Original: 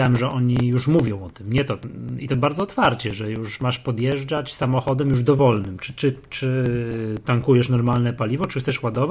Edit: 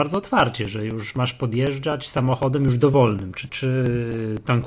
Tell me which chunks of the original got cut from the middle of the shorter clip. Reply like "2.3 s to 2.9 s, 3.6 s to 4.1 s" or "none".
5.9 s to 6.3 s